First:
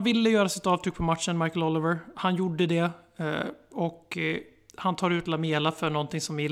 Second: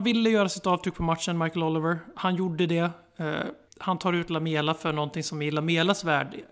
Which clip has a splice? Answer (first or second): second